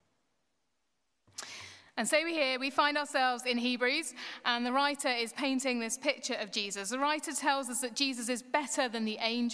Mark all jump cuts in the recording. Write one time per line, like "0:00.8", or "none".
none